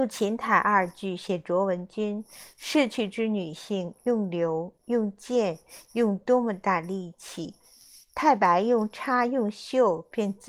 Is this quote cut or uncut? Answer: uncut